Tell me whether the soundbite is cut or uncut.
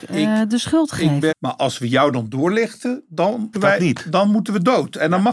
cut